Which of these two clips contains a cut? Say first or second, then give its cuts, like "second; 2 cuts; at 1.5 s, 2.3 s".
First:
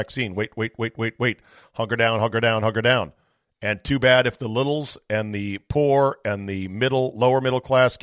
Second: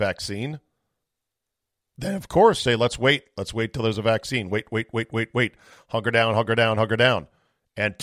second; 1 cut; at 2.7 s